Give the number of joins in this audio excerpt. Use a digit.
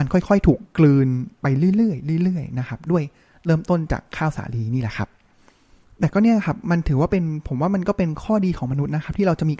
0